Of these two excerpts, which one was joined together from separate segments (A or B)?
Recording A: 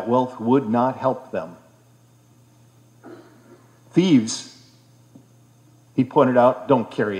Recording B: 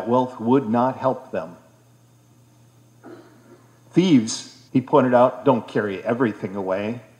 B